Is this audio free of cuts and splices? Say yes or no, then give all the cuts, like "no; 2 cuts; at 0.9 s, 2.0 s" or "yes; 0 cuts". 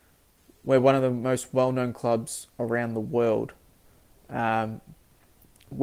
yes; 0 cuts